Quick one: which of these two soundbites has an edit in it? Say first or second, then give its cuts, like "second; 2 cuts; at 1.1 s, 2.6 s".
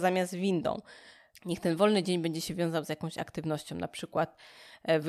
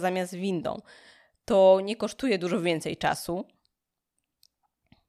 first; 1 cut; at 1.4 s